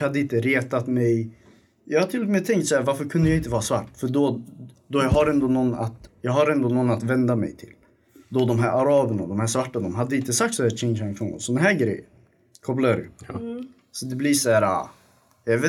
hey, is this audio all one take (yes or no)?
no